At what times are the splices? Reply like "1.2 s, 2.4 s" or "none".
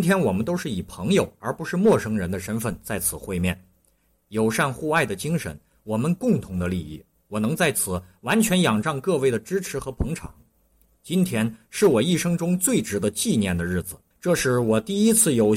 14.1 s